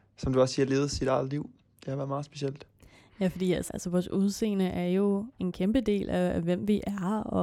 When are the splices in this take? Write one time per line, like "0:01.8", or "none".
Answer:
0:03.7